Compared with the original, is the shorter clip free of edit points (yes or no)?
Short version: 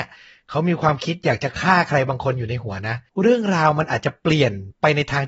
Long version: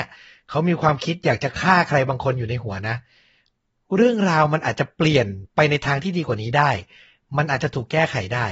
no